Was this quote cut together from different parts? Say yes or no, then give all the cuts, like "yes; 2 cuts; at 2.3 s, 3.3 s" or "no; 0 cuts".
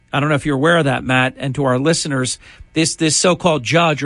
no; 0 cuts